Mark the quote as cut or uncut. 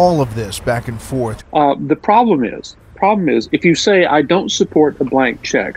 cut